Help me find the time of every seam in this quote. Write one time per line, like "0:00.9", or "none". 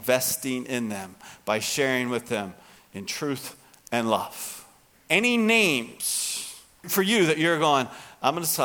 0:04.9
0:06.8